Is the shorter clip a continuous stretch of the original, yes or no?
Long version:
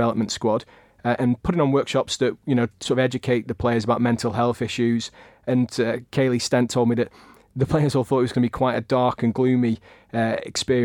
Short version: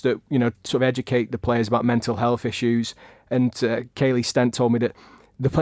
yes